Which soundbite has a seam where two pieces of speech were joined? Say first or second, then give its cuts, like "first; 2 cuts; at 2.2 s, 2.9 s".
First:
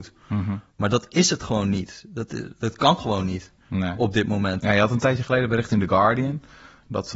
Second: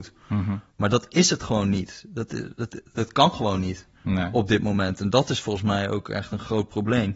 first; 2 cuts; at 2.6 s, 4.6 s